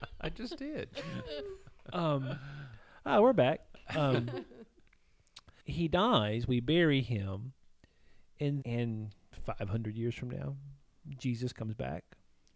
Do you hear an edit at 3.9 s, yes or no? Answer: no